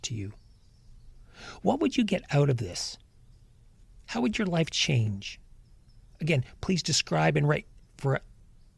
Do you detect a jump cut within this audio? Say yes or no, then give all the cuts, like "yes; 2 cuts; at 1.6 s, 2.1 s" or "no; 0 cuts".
no; 0 cuts